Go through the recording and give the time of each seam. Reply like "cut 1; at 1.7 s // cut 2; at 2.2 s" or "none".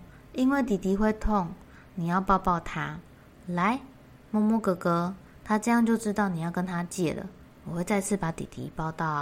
cut 1; at 3.2 s // cut 2; at 7.5 s